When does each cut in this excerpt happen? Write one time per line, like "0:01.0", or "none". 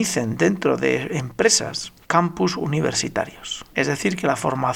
0:02.0
0:03.7